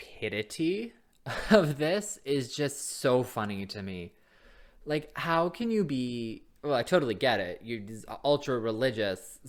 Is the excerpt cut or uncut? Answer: uncut